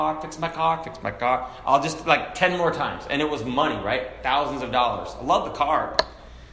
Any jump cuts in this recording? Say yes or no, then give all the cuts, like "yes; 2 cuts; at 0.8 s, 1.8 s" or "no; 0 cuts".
no; 0 cuts